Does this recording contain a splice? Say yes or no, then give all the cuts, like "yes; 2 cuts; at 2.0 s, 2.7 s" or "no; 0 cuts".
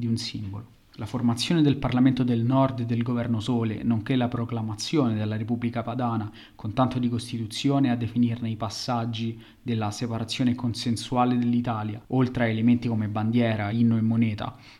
no; 0 cuts